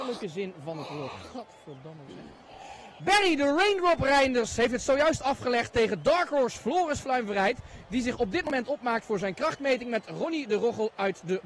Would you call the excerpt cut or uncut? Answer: cut